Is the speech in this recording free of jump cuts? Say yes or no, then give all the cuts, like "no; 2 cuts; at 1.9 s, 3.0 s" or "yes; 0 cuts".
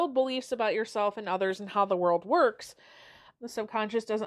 no; 1 cut; at 3.4 s